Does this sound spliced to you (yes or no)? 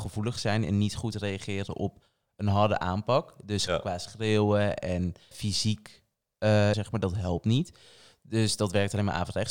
yes